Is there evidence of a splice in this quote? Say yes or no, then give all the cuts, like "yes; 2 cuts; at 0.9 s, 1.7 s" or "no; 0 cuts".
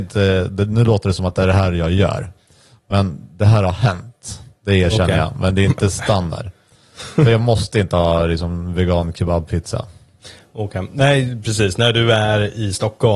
no; 0 cuts